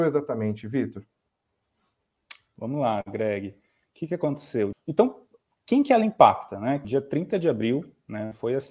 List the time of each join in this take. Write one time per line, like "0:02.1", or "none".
0:04.7
0:06.8